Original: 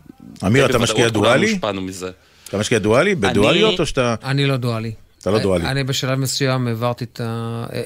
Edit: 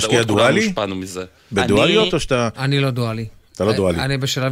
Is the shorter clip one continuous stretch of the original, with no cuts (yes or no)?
no